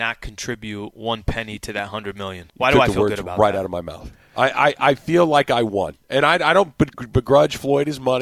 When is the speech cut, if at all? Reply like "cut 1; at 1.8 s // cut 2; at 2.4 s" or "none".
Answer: cut 1; at 2.5 s